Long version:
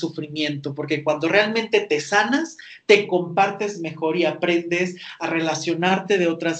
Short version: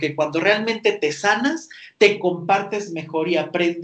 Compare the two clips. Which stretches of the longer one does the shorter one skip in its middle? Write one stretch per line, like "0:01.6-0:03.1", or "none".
none